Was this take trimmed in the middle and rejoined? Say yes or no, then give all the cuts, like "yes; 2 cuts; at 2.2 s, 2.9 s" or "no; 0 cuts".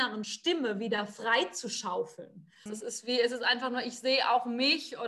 yes; 1 cut; at 2.7 s